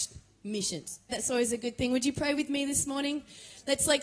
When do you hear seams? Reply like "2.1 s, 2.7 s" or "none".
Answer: 1.1 s

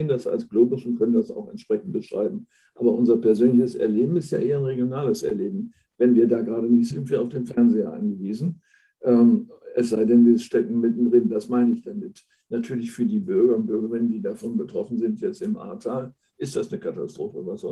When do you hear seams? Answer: 6.9 s

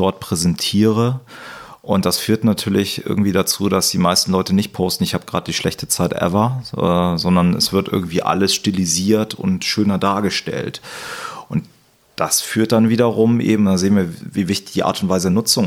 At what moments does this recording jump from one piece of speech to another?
none

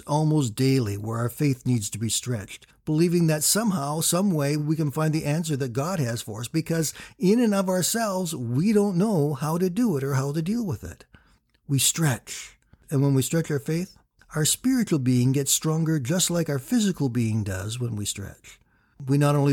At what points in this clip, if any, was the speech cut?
none

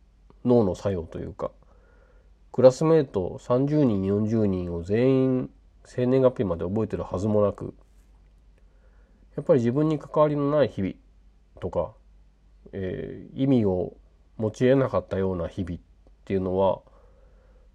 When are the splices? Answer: none

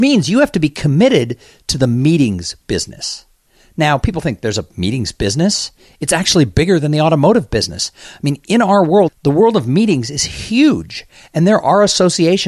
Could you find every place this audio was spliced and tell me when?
9.1 s

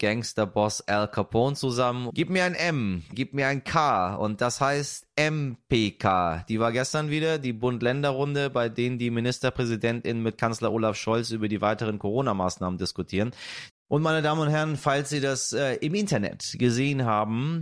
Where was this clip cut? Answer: 2.1 s, 3.1 s, 13.7 s

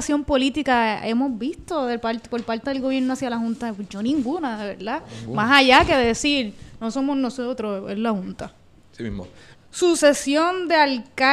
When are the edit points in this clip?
9.6 s

